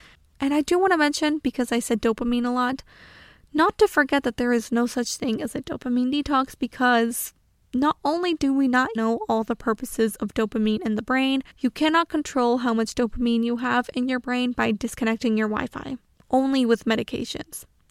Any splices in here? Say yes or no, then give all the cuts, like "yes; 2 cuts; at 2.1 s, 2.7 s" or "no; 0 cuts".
yes; 2 cuts; at 9.0 s, 11.5 s